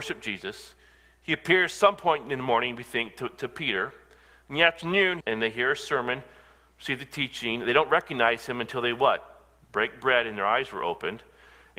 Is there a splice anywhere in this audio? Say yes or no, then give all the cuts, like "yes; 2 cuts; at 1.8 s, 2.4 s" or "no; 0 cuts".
yes; 1 cut; at 5.2 s